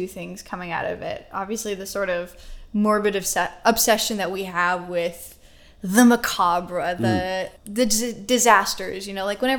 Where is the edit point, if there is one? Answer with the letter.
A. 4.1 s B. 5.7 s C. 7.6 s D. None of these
C